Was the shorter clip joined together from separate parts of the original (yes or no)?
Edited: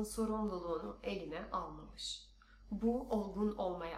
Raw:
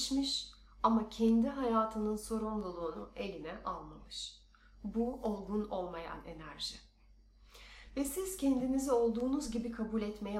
no